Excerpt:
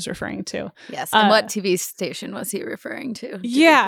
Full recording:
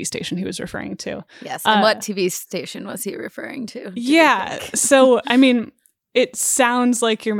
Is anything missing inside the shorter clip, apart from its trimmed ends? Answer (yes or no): no